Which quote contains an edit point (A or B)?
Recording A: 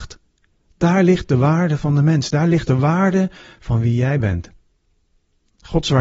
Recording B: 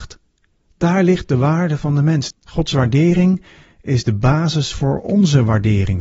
B